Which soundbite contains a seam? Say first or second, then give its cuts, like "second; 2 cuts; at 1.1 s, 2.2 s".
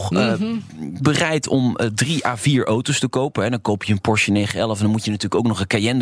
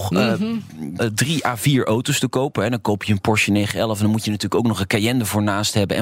second; 1 cut; at 1.0 s